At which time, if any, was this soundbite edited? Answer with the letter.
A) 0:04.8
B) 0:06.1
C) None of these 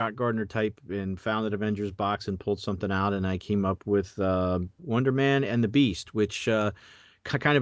A